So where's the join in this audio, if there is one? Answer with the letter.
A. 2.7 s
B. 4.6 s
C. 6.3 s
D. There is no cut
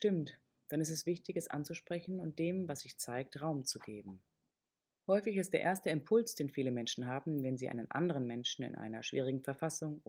D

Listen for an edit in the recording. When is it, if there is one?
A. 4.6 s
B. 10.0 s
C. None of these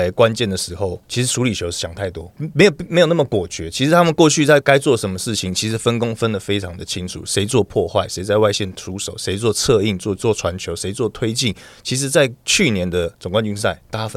A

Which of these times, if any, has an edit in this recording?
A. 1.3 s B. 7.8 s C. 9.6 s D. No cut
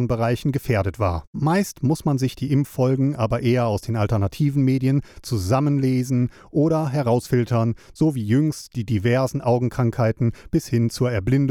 A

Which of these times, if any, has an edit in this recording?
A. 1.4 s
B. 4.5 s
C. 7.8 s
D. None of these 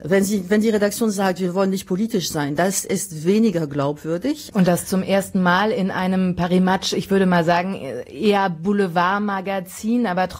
B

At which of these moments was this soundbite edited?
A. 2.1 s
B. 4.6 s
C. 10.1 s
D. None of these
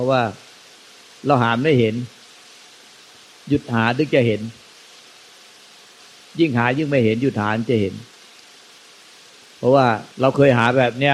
C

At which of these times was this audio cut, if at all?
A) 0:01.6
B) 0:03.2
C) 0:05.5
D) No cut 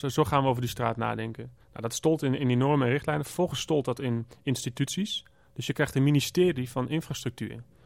A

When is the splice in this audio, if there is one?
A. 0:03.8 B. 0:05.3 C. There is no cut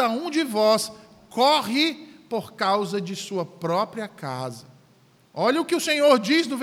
B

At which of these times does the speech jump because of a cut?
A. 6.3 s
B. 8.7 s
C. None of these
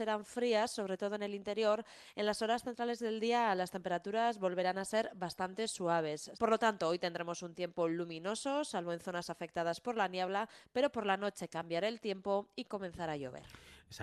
A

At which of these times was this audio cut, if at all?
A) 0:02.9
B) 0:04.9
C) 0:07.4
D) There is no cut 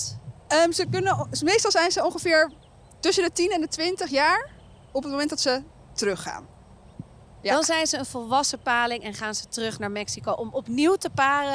C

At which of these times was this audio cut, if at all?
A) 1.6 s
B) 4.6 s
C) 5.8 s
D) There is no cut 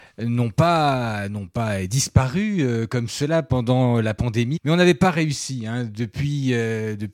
B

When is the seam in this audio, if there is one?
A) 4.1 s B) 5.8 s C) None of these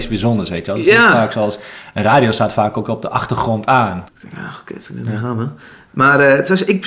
A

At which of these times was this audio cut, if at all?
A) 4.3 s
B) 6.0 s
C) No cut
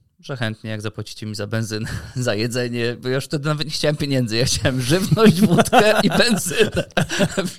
B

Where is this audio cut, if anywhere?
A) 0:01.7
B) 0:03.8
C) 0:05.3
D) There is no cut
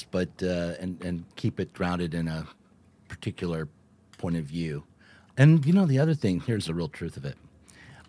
C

